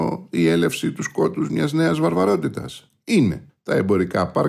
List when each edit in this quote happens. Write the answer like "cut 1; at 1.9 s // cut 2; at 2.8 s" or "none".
cut 1; at 3.6 s